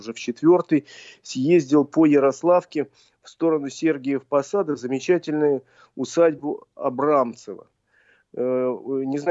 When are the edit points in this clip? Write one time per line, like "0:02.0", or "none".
none